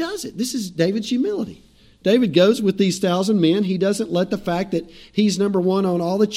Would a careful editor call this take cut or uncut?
uncut